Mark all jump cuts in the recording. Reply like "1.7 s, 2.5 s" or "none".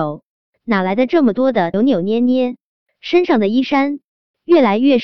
1.7 s